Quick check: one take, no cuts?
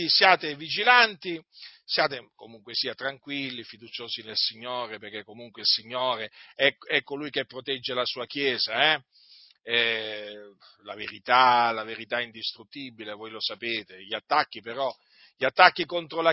yes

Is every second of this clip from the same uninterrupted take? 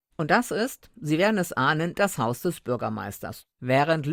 yes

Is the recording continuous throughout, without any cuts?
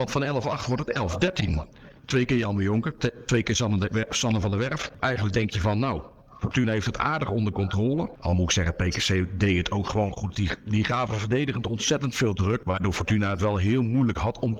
no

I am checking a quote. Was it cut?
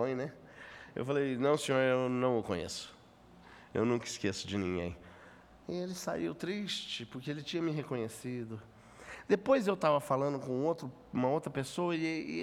no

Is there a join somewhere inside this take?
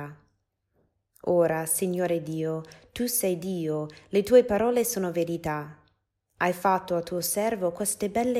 no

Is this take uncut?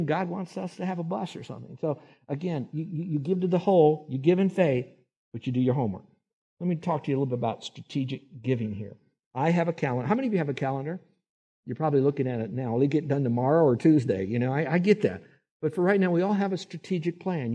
yes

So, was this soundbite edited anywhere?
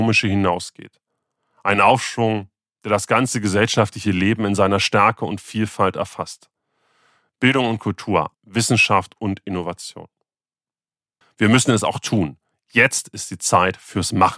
yes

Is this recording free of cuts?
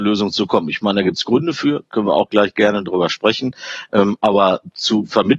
yes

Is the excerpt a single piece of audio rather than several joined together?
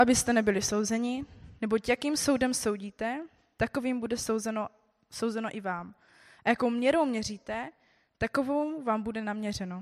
yes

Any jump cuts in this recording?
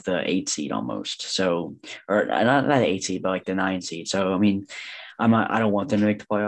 no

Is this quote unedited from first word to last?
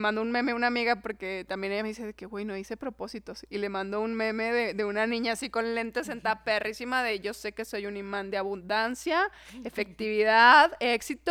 yes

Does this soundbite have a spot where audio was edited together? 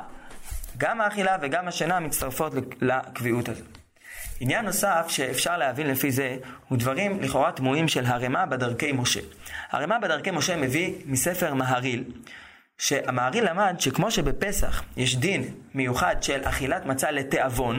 no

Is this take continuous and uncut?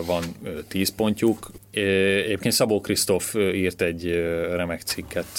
no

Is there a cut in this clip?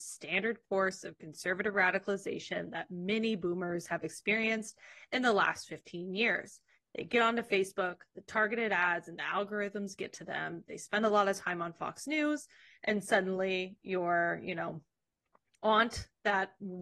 no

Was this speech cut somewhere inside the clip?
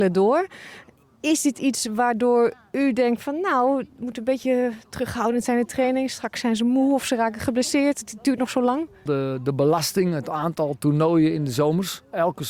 yes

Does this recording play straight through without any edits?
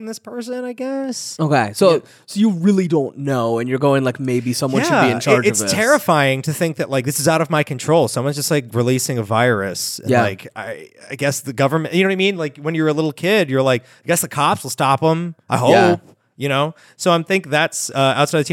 yes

